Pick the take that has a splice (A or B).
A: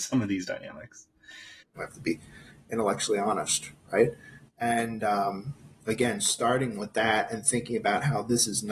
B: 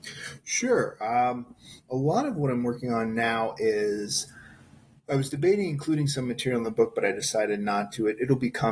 A